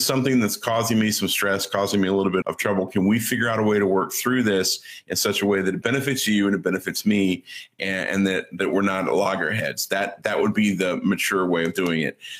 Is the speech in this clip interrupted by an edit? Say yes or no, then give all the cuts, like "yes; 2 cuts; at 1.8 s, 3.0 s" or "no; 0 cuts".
yes; 1 cut; at 2.4 s